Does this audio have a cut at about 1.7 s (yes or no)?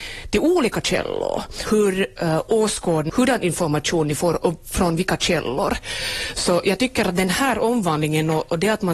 yes